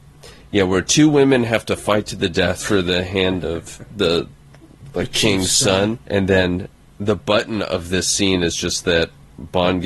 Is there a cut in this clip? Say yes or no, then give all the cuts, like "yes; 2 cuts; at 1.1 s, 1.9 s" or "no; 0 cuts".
yes; 1 cut; at 6.0 s